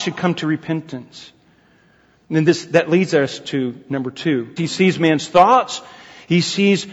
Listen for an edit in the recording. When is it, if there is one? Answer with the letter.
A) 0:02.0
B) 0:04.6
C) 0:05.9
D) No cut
B